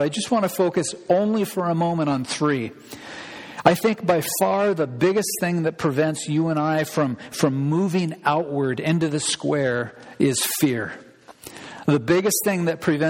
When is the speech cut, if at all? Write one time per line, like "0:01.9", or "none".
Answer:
none